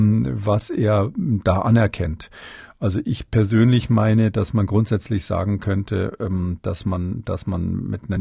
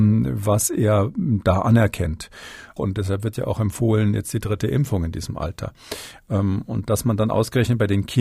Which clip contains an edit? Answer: second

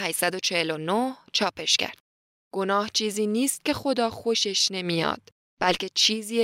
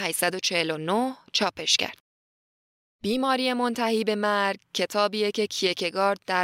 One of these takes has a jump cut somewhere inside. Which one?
first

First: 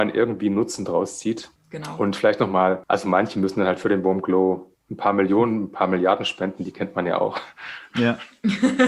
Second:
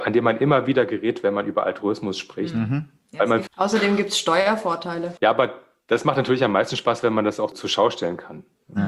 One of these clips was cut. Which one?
second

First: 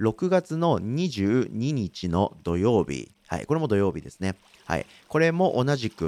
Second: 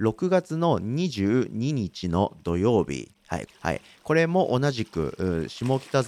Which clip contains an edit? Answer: second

